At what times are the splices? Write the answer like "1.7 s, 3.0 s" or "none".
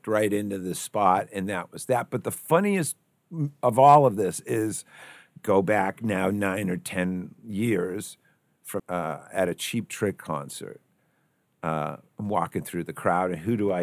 8.8 s